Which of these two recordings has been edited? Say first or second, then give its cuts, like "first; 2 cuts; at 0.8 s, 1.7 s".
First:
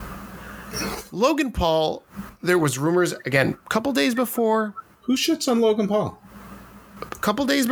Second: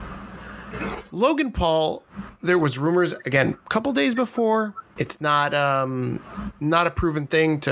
second; 1 cut; at 5.0 s